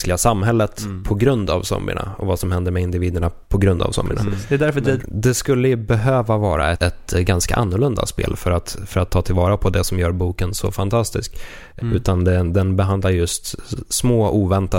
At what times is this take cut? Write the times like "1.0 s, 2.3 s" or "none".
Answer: 5.0 s, 6.7 s, 11.8 s